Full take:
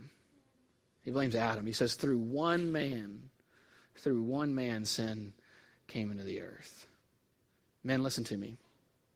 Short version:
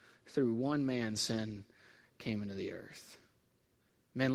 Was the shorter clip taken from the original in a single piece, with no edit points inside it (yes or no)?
yes